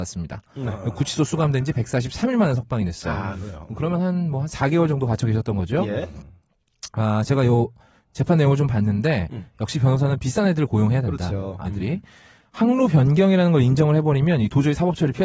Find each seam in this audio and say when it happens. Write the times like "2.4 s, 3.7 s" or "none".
11.6 s